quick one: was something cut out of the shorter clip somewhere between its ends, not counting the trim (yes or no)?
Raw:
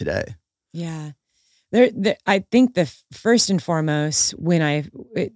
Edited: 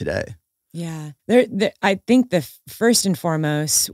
yes